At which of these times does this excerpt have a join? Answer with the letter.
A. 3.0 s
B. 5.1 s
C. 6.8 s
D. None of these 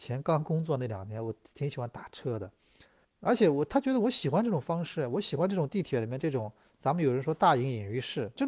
A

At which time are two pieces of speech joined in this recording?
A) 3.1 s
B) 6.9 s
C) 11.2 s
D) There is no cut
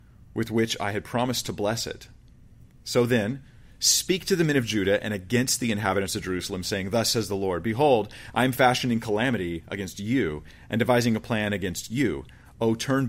D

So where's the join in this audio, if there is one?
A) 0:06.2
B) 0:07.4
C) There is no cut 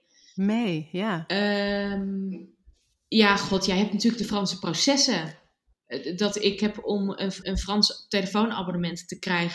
B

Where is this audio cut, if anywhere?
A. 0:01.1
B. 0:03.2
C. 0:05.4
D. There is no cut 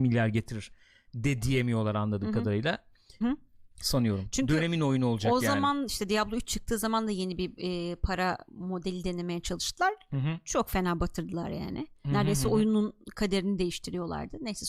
B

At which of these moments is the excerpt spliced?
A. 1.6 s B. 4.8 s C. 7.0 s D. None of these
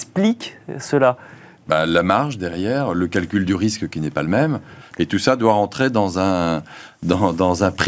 B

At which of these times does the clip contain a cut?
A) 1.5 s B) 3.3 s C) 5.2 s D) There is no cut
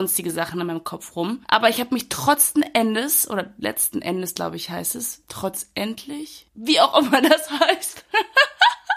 D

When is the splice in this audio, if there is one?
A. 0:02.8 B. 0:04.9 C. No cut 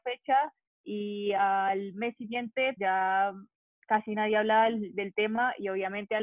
A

